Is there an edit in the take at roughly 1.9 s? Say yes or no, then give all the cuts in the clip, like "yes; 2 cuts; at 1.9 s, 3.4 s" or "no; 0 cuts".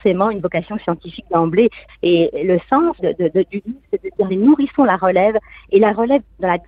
yes; 3 cuts; at 1.9 s, 3.0 s, 4.3 s